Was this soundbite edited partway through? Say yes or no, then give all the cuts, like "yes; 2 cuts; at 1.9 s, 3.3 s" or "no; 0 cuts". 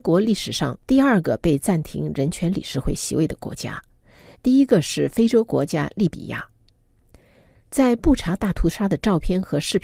no; 0 cuts